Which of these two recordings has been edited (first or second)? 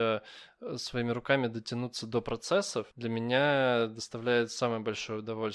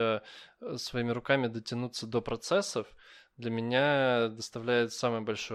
first